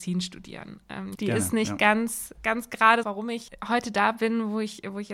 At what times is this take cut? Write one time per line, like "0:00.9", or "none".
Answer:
0:01.1
0:03.0